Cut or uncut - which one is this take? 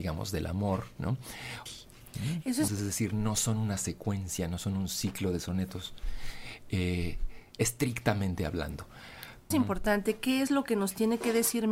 cut